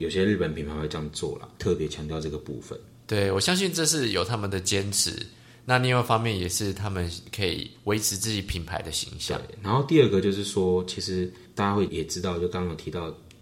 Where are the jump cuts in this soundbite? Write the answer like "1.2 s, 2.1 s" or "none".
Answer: 11.9 s